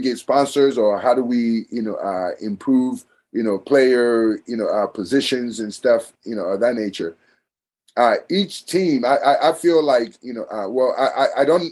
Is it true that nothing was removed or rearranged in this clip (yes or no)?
yes